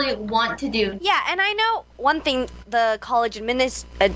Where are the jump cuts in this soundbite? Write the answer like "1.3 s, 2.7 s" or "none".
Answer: 1.0 s